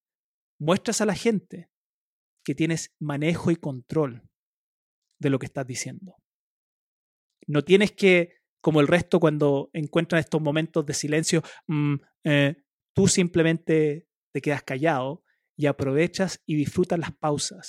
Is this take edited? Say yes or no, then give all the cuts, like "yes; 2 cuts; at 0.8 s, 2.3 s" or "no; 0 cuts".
yes; 1 cut; at 11.6 s